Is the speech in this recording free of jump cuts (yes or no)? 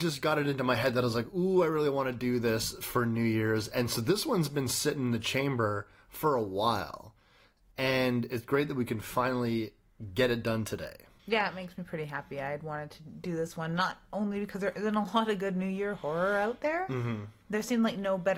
yes